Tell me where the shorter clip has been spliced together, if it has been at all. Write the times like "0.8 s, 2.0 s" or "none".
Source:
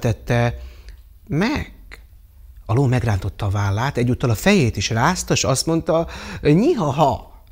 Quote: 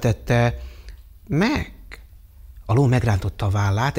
none